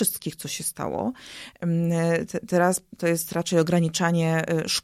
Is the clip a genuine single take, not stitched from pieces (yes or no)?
yes